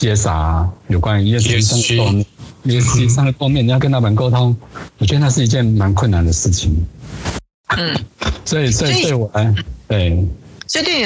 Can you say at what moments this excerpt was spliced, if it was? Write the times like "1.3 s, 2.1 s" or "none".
3.8 s